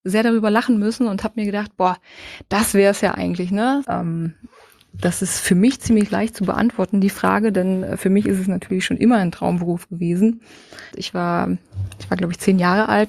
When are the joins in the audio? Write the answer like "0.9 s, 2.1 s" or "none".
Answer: 3.8 s, 10.9 s

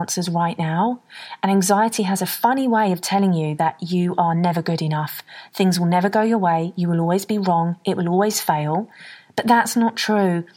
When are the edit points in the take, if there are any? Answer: none

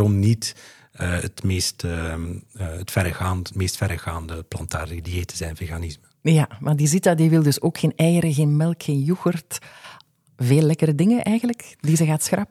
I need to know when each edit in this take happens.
none

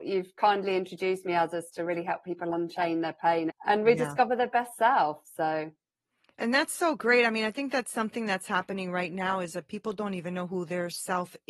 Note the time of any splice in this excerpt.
3.5 s

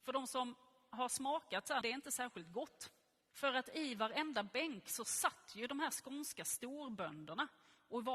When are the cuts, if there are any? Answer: 1.8 s, 3.3 s

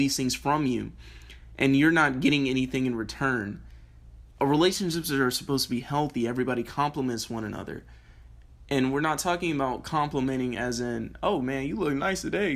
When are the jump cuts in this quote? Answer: none

